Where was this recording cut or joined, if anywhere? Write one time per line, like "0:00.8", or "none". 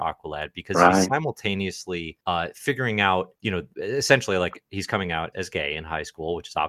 0:02.2
0:03.4
0:05.3